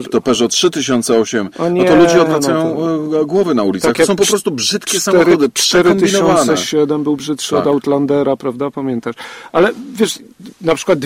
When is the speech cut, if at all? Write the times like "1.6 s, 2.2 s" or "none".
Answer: none